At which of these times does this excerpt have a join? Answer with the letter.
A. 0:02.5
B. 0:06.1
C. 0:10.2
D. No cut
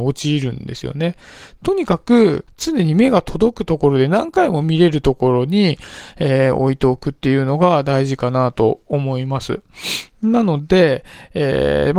A